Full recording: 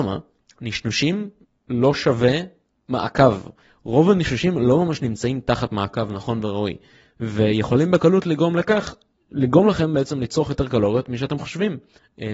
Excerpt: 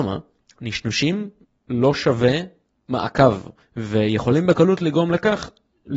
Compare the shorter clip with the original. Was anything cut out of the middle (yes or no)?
yes